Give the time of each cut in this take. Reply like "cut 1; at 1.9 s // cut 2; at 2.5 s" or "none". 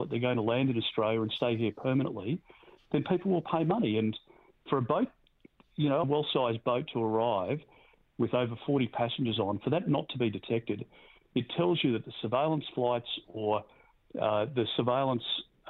cut 1; at 6.0 s